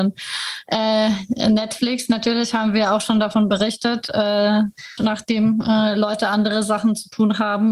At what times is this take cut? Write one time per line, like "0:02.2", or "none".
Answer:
0:05.0